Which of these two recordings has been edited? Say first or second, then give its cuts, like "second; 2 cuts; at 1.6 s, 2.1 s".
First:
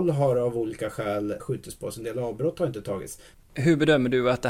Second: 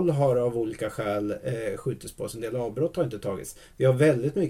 first; 2 cuts; at 1.4 s, 3.3 s